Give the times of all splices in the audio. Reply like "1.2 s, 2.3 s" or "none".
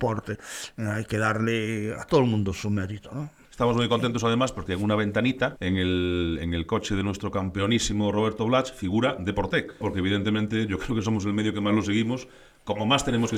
3.4 s, 5.6 s, 9.8 s